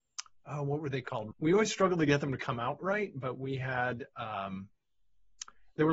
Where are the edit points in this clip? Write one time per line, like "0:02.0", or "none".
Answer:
0:01.3
0:02.8